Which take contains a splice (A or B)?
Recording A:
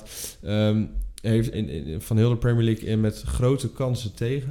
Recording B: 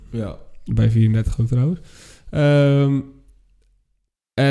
A